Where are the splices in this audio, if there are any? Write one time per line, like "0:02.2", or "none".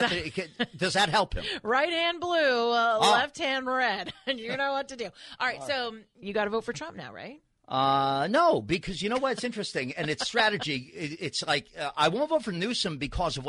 0:06.2